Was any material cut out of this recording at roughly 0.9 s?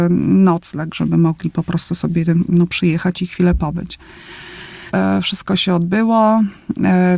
no; 1 cut; at 4.9 s

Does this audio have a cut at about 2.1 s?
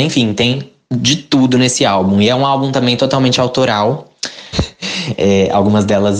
no; 1 cut; at 4.5 s

